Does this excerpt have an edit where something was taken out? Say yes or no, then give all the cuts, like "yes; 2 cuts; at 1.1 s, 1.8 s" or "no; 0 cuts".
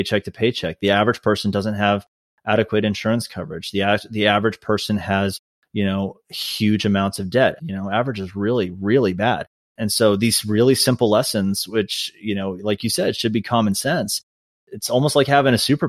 yes; 1 cut; at 7.6 s